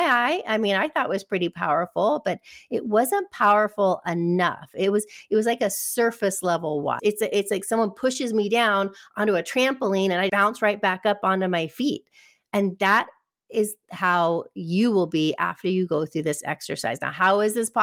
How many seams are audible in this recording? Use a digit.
2